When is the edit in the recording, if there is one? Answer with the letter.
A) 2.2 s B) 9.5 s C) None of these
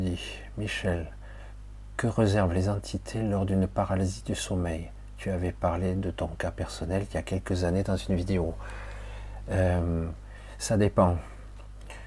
C